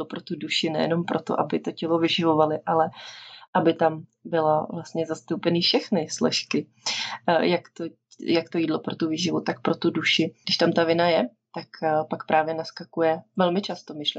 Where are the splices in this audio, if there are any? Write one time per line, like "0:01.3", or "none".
0:10.4